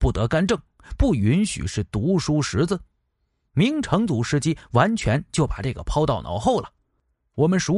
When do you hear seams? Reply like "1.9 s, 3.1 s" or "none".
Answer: none

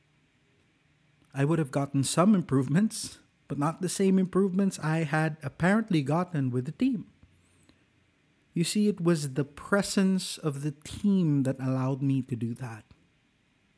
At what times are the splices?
none

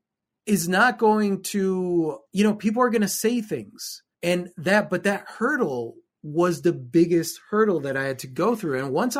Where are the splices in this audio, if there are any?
2.3 s, 4.1 s

